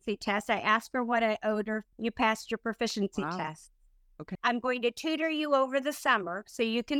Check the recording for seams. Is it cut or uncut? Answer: cut